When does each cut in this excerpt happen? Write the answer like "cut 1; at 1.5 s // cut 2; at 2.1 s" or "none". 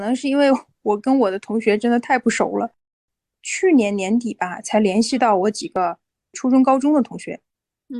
none